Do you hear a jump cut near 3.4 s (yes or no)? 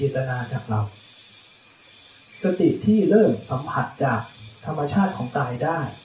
no